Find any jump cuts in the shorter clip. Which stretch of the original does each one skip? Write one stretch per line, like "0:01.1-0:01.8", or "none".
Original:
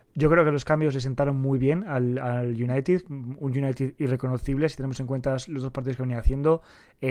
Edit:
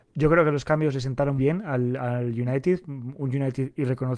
0:01.4-0:01.6